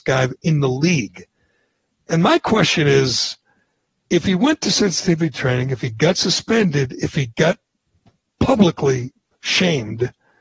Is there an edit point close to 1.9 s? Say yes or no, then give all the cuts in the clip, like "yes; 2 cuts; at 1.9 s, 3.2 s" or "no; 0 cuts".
no; 1 cut; at 9.3 s